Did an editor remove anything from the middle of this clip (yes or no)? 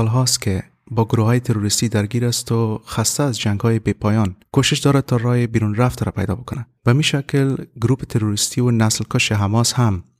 yes